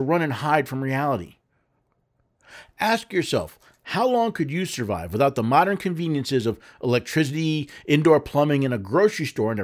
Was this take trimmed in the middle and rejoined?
no; 0 cuts

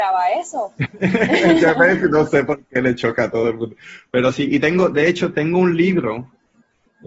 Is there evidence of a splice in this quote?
no; 0 cuts

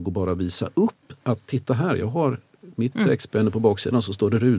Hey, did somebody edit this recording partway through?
no; 0 cuts

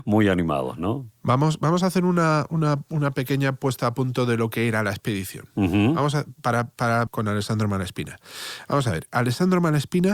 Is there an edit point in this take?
yes; 1 cut; at 7.1 s

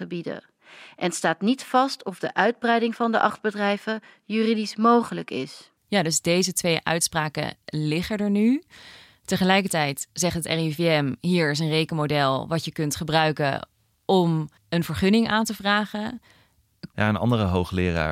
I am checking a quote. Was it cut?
yes; 3 cuts; at 5.8 s, 14.6 s, 16.9 s

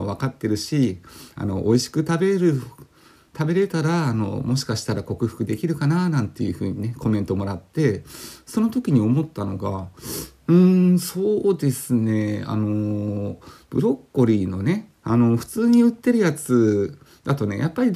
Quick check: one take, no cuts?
yes; 0 cuts

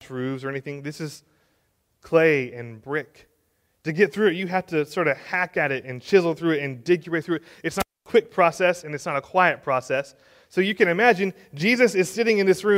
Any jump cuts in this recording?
no; 0 cuts

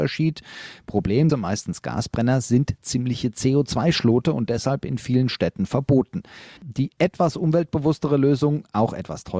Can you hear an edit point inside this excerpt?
yes; 2 cuts; at 1.3 s, 6.6 s

